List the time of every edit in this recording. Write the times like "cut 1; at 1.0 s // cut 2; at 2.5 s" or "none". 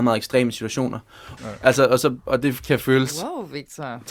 cut 1; at 1.4 s